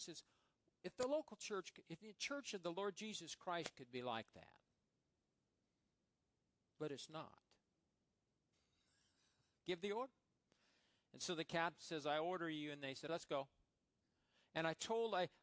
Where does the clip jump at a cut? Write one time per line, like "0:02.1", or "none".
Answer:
0:08.5
0:13.1